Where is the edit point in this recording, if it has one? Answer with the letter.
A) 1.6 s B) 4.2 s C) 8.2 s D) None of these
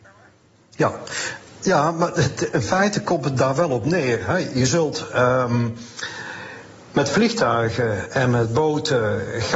D